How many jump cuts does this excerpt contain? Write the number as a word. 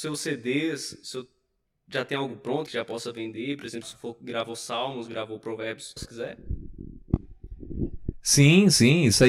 three